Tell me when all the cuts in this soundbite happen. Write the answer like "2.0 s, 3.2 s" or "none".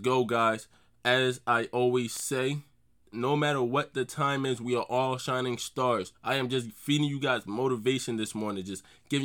none